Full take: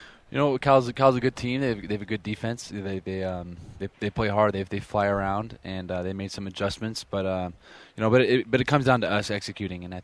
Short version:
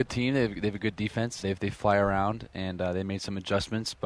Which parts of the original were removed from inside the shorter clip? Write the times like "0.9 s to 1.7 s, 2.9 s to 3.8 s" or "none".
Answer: 2.7 s to 4.5 s